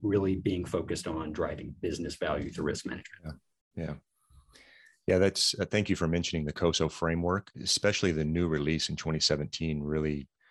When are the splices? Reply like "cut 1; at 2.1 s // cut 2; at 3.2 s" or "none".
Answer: none